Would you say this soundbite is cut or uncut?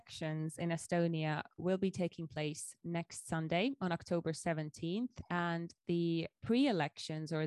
uncut